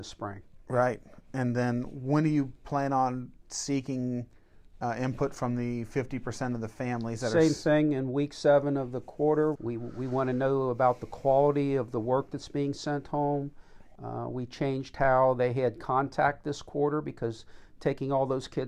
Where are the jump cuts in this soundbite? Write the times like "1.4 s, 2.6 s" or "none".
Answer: 9.6 s, 14.0 s